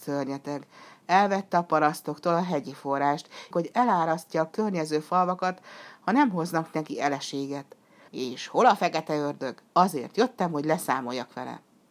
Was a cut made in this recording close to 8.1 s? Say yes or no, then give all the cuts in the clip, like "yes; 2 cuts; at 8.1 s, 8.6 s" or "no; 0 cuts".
yes; 3 cuts; at 3.5 s, 8.1 s, 9.7 s